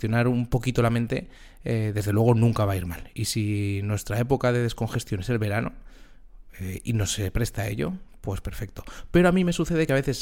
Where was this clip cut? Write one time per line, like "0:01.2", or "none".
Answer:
none